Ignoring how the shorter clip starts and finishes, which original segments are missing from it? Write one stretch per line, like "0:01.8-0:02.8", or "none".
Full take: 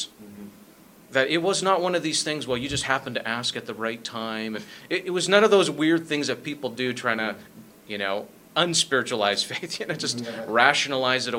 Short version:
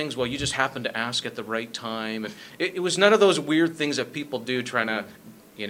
none